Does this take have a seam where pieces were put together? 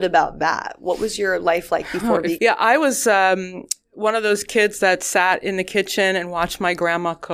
yes; 1 cut; at 2.4 s

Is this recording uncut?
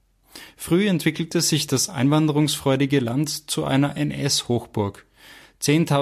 yes; 0 cuts

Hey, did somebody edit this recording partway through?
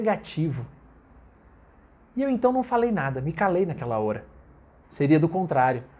yes; 1 cut; at 4.8 s

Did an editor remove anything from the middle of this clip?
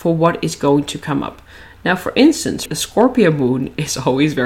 yes; 1 cut; at 2.7 s

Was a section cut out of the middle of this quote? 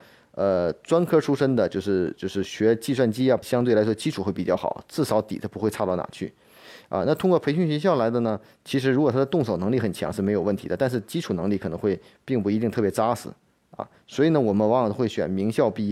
yes; 1 cut; at 3.4 s

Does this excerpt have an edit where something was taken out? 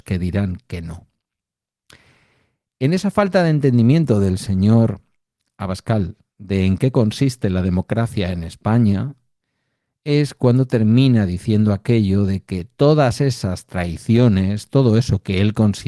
no; 0 cuts

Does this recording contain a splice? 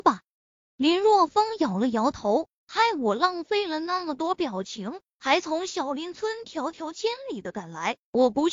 no; 0 cuts

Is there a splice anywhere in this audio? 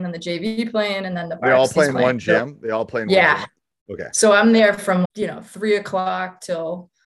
yes; 1 cut; at 5.0 s

